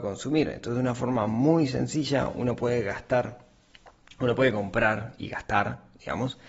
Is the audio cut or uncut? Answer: uncut